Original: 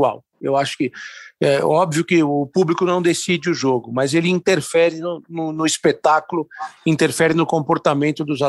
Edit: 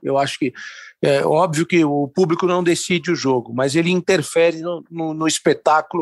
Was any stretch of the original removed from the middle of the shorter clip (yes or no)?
no